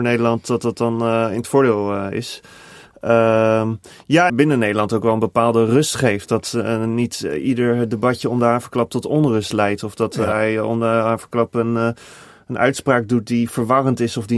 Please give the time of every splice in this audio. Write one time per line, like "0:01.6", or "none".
0:04.3